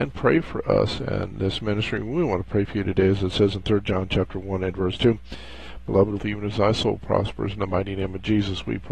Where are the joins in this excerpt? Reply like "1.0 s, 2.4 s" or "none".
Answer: 6.2 s